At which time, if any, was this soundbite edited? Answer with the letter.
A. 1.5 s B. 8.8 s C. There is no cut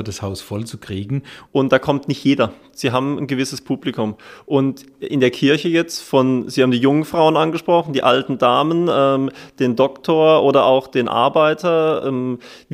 A